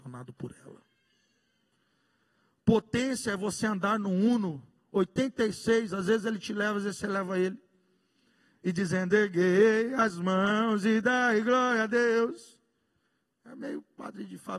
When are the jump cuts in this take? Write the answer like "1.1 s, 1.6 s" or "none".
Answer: none